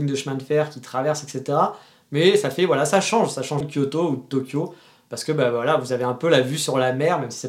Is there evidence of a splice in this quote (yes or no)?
yes